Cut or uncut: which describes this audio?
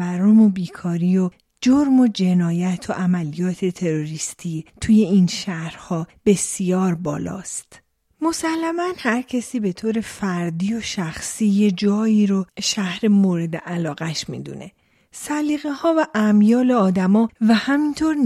cut